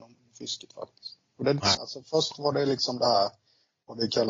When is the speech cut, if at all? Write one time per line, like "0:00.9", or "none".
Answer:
0:01.7